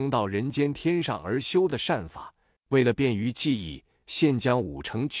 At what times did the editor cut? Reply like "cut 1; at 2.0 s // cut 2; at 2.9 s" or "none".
cut 1; at 2.6 s